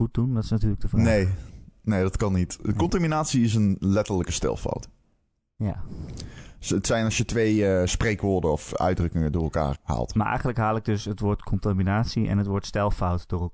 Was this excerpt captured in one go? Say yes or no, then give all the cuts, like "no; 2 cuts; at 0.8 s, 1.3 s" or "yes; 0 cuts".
no; 1 cut; at 9.7 s